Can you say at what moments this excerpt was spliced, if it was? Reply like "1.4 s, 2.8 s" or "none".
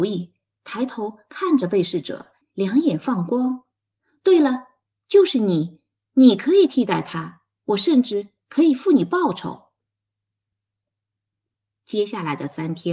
none